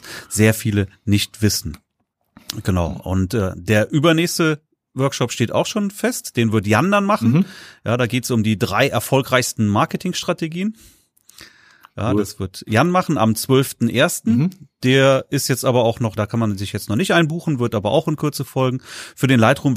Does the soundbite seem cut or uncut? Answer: cut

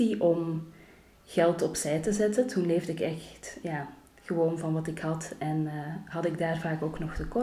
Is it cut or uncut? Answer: uncut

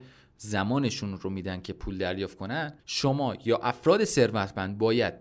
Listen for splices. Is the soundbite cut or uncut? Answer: cut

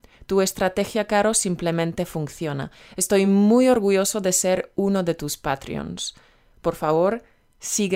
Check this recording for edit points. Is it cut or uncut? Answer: uncut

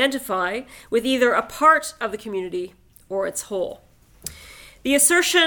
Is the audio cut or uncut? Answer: uncut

